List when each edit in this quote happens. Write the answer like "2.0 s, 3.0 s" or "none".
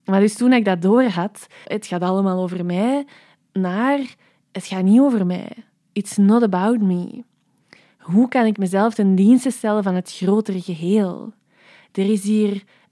1.6 s